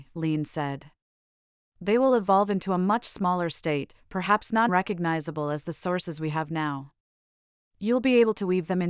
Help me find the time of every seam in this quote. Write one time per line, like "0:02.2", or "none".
0:04.7